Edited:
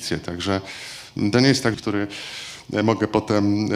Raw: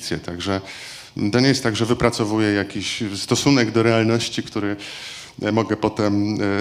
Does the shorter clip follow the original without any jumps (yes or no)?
no